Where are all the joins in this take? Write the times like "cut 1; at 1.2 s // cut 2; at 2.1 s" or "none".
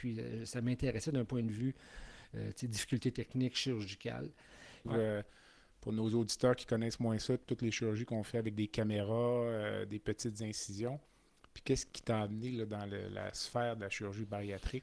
cut 1; at 4.8 s